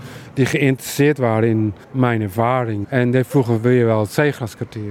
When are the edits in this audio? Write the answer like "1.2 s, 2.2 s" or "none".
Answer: 1.8 s, 2.8 s